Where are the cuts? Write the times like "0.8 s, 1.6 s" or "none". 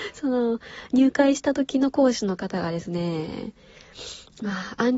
none

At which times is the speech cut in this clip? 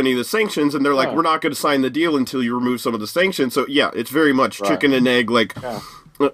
none

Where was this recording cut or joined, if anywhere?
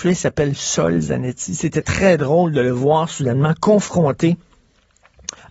none

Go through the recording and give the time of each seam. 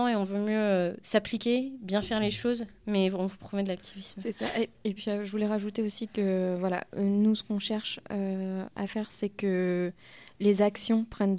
none

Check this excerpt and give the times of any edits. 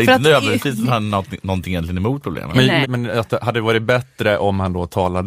2.8 s

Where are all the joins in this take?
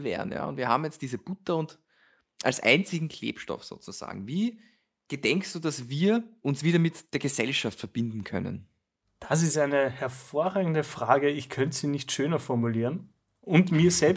none

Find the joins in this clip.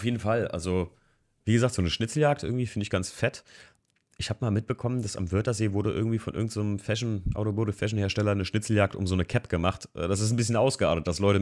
none

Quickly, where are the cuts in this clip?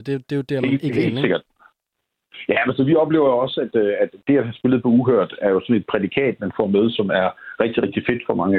none

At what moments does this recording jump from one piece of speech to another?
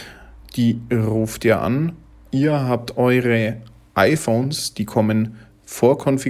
2.3 s

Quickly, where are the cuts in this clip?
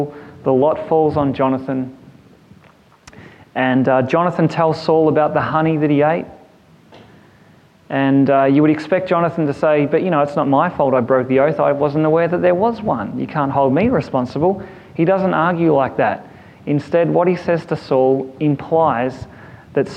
none

